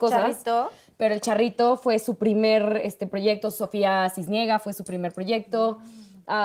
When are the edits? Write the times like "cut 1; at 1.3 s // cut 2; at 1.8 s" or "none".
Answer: none